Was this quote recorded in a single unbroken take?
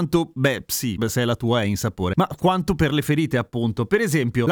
yes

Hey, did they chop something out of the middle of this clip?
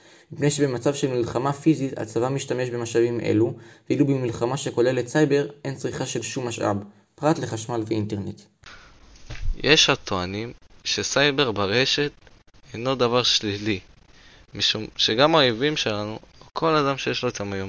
no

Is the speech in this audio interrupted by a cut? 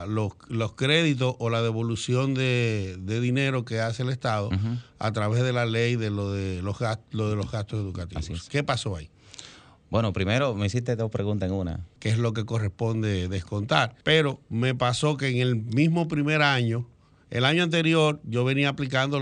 yes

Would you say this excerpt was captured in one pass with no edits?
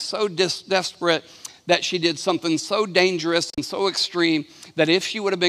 yes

